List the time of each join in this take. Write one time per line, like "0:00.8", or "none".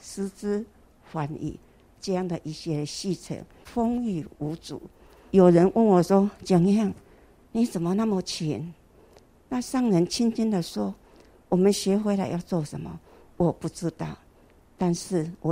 0:09.4